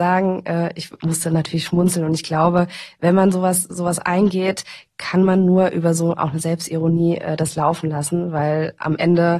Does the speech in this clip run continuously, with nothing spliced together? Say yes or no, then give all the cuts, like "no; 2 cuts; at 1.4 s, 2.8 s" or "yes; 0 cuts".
yes; 0 cuts